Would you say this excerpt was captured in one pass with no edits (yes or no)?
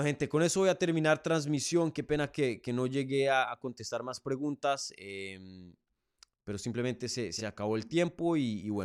yes